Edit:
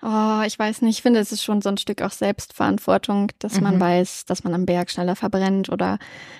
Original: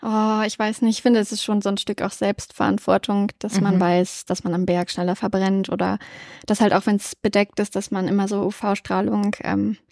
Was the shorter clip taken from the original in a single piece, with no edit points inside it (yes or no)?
yes